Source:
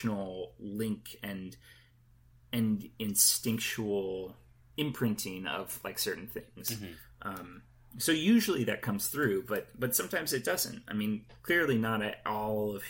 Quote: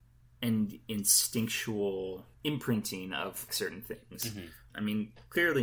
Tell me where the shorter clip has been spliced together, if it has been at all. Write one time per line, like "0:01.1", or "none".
0:02.3
0:03.5
0:04.7